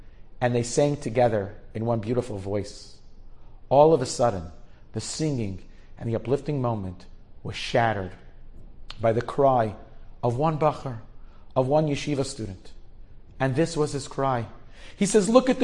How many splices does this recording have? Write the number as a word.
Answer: zero